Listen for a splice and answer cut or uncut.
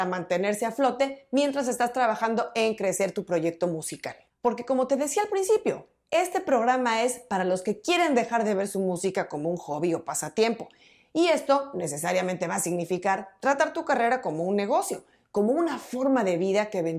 cut